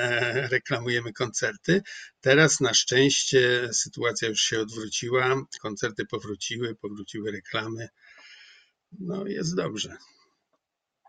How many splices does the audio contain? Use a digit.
0